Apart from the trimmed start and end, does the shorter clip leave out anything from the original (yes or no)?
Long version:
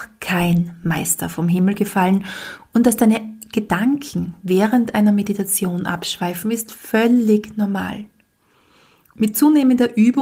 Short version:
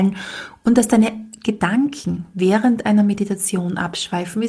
no